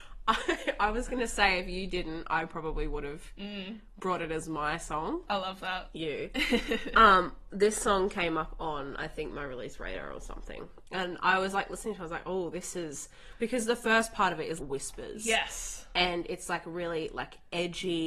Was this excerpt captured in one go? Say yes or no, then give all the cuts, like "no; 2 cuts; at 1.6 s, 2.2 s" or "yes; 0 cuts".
no; 2 cuts; at 5.9 s, 14.6 s